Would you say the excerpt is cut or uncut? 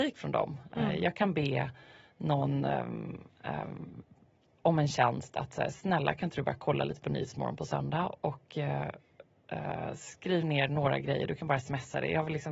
uncut